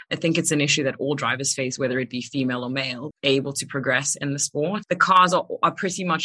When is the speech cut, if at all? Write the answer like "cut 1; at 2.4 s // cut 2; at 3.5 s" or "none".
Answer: cut 1; at 3.1 s // cut 2; at 4.8 s